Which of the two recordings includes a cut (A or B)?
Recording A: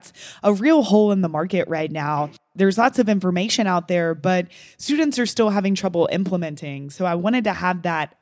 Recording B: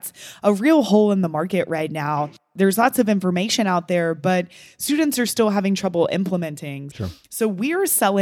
B